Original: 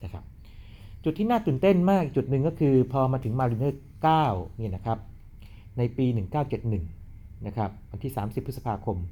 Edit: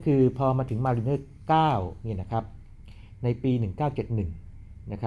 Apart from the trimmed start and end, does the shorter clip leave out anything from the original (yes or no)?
no